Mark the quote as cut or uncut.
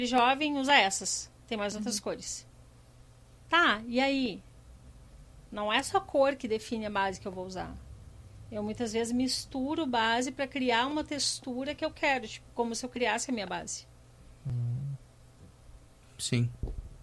uncut